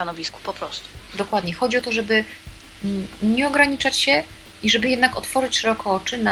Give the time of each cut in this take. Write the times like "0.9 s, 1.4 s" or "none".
none